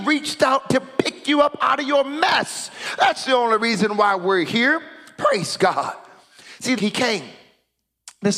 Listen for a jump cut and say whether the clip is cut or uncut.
cut